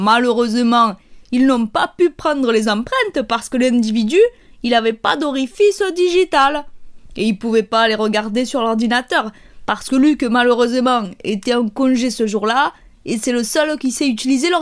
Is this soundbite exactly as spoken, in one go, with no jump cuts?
yes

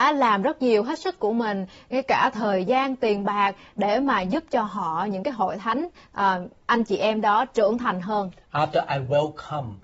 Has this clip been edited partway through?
no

